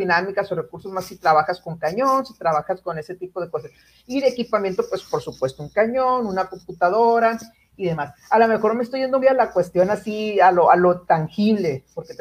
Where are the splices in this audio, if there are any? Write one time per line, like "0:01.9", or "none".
0:09.2